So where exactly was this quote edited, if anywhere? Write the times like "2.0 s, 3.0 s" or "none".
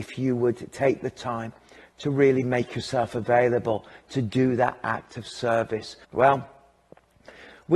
6.0 s